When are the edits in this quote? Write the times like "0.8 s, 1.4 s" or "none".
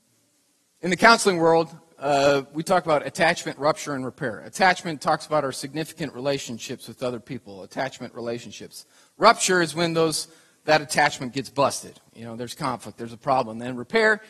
none